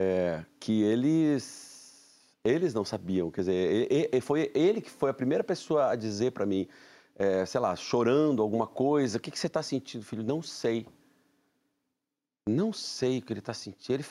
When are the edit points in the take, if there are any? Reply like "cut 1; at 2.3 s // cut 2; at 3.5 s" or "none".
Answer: none